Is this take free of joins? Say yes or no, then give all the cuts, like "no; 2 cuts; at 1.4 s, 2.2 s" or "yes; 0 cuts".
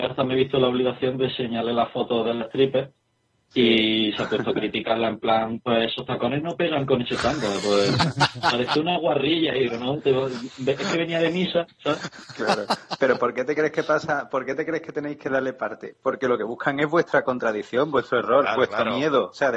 yes; 0 cuts